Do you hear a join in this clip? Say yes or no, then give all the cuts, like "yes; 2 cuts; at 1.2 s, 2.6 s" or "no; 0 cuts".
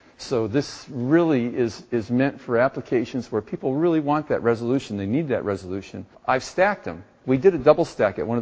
yes; 1 cut; at 6.1 s